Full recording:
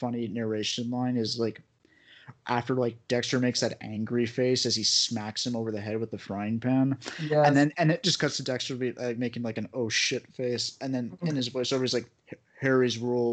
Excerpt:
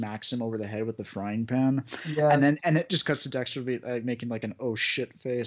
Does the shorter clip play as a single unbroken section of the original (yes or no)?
yes